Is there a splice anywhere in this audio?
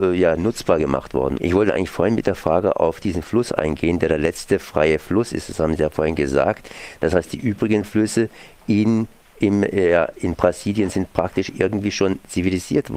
yes; 1 cut; at 1.4 s

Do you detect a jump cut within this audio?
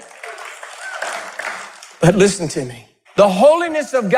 yes; 1 cut; at 3.0 s

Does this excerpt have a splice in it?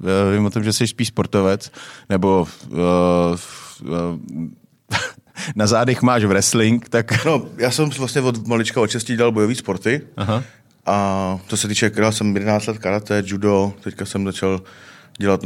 yes; 1 cut; at 7.2 s

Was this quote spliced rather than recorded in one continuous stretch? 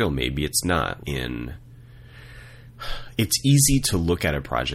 yes; 1 cut; at 1.0 s

